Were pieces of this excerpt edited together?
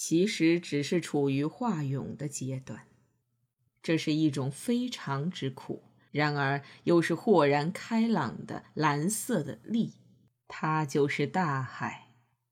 yes; 2 cuts; at 3.7 s, 6.1 s

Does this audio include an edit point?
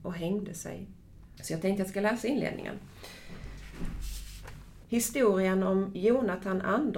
yes; 2 cuts; at 1.4 s, 4.8 s

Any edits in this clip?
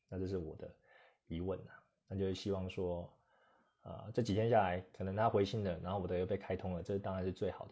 no; 0 cuts

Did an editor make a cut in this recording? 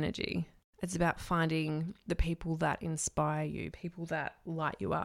yes; 1 cut; at 3.7 s

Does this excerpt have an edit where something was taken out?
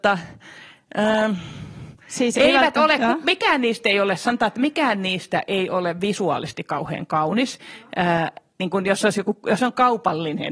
no; 0 cuts

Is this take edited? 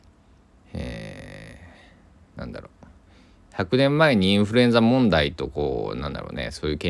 no; 0 cuts

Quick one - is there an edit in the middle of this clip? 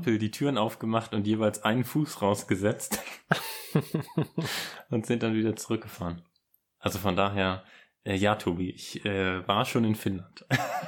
no; 0 cuts

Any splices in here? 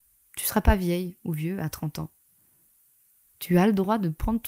no; 0 cuts

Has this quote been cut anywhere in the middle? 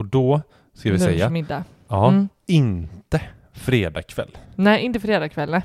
no; 0 cuts

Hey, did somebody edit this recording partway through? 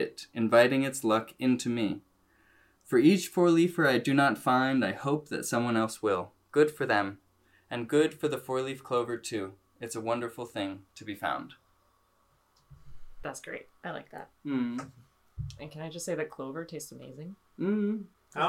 no; 0 cuts

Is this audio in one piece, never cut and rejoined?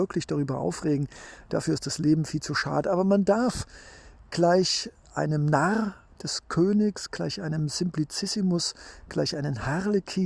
yes; 0 cuts

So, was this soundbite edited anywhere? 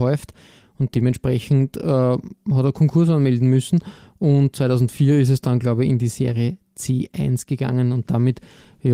no; 0 cuts

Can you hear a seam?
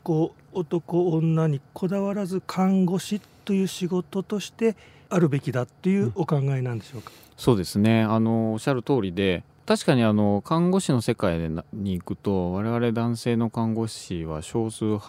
no; 0 cuts

